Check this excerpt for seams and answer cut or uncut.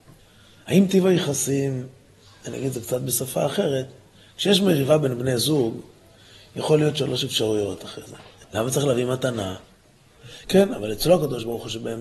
cut